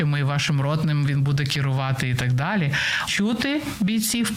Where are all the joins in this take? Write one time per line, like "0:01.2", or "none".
0:03.1